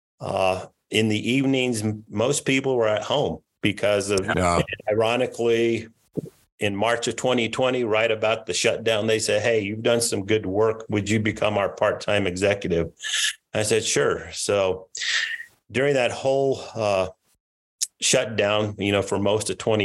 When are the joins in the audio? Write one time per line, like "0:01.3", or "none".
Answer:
0:04.3
0:17.9